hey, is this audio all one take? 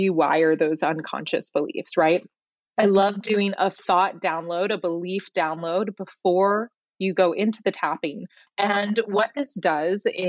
no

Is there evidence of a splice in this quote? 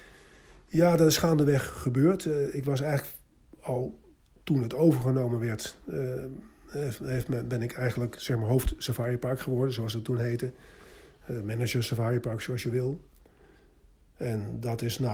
no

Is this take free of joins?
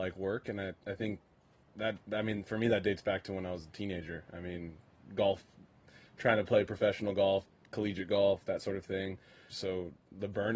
no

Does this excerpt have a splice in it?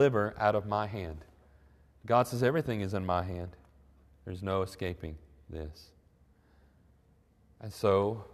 no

